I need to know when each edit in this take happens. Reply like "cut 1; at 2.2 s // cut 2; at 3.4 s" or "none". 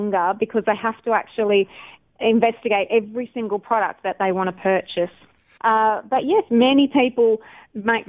cut 1; at 5.6 s